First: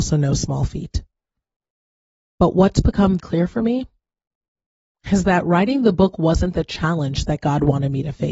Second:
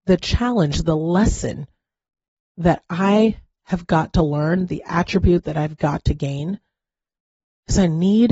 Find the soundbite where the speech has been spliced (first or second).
first